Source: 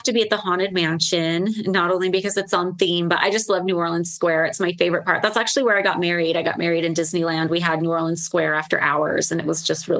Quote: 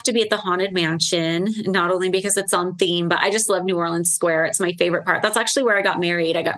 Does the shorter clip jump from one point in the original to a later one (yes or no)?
no